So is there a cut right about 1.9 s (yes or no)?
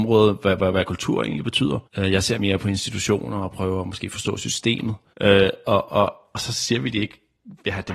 yes